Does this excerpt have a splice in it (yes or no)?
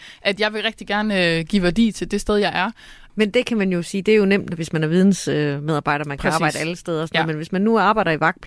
yes